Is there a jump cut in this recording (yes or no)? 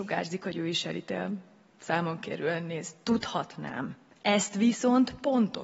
no